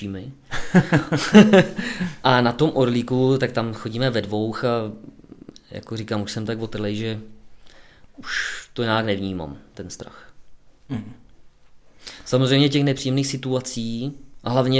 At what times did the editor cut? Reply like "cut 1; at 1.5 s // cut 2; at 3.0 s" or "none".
cut 1; at 8.1 s